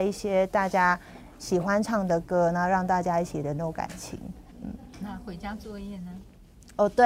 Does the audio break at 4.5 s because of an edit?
yes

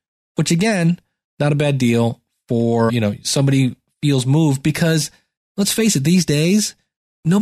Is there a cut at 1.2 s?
no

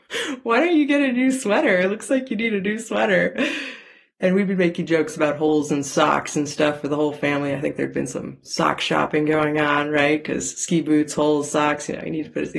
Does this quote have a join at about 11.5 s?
no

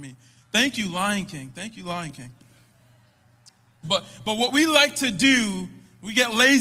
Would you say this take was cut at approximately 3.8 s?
yes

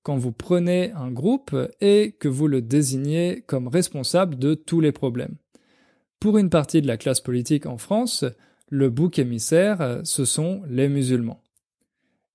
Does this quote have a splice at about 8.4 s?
no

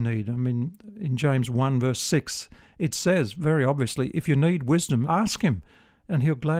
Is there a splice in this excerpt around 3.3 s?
no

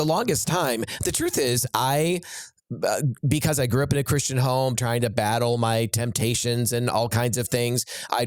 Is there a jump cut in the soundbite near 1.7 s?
no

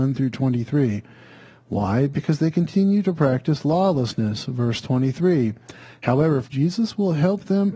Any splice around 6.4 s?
yes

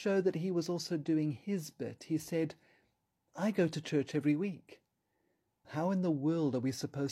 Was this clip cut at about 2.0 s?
no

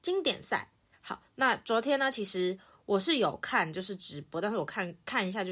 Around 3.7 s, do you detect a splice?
no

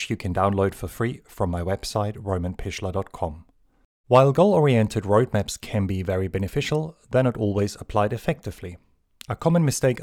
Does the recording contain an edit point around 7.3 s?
no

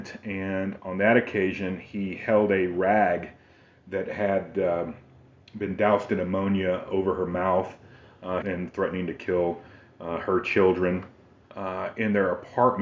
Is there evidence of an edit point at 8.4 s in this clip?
yes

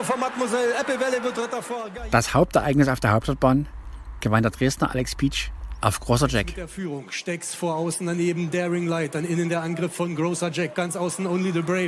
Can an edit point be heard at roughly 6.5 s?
no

